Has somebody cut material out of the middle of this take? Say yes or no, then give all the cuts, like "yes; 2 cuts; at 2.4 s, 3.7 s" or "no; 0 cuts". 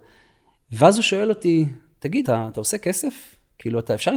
yes; 1 cut; at 2.2 s